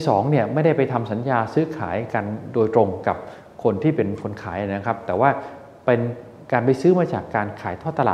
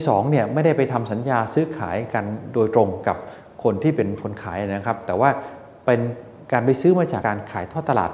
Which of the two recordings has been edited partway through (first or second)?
second